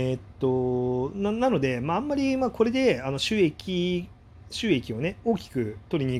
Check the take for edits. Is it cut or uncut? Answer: uncut